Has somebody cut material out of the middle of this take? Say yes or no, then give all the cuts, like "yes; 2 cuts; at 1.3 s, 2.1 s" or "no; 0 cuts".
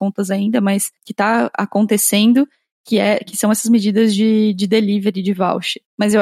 no; 0 cuts